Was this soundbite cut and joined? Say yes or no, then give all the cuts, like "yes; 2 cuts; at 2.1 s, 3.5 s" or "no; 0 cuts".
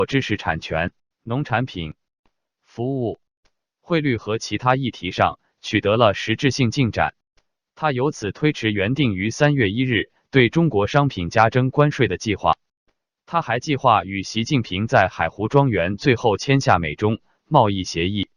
yes; 1 cut; at 1.1 s